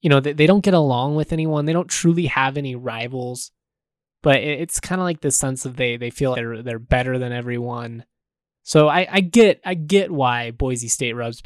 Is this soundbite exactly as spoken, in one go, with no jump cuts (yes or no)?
no